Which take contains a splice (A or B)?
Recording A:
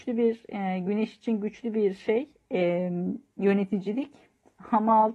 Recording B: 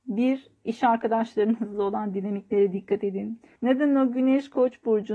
B